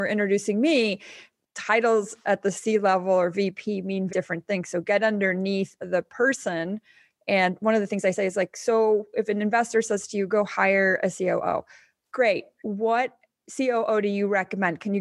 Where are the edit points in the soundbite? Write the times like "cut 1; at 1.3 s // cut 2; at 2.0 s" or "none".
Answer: cut 1; at 4.1 s